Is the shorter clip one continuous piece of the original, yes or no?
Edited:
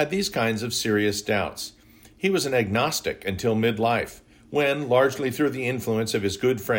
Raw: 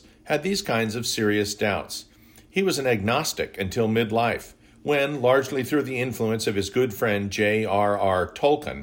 yes